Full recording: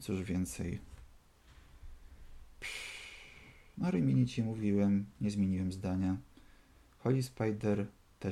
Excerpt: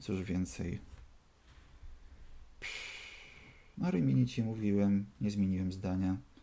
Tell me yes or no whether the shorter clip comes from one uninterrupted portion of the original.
yes